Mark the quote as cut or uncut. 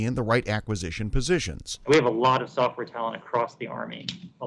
uncut